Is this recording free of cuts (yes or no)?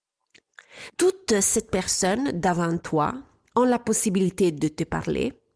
no